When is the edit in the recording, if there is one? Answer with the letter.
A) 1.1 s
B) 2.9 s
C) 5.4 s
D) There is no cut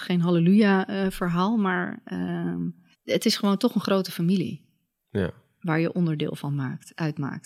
B